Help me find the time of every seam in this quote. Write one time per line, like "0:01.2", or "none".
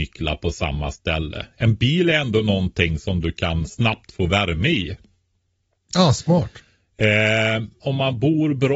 0:07.8

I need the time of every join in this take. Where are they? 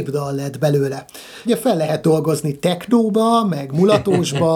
0:01.5

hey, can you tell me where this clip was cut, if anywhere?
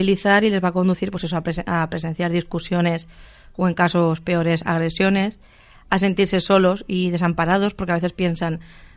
0:01.1

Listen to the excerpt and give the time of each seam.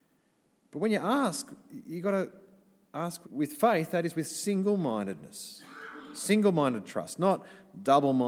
0:03.2

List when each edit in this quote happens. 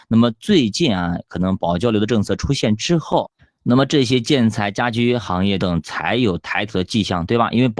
0:05.6

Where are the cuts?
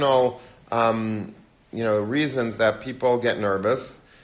none

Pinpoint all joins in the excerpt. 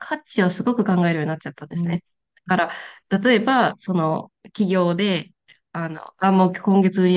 none

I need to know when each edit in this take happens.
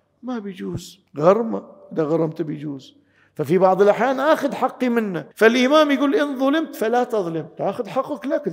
0:01.1
0:05.3

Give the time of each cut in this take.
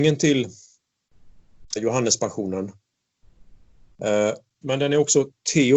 0:01.8
0:04.6

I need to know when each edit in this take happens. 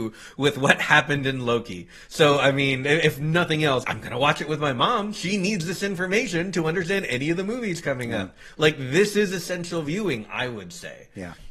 0:03.8

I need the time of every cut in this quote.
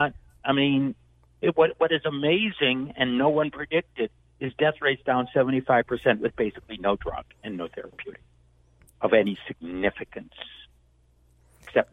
none

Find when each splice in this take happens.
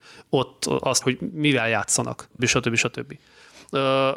0:01.0
0:02.4

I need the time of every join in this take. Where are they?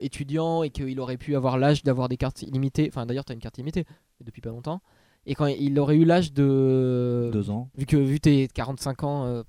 0:07.7

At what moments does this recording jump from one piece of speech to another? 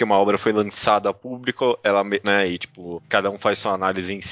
0:02.2

